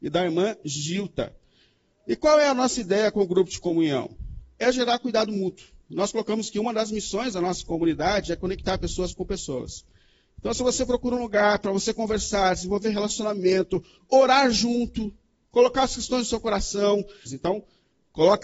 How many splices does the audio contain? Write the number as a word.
one